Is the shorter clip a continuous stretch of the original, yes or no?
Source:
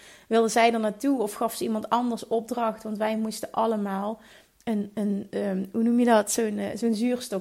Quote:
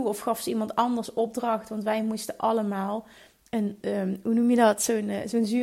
no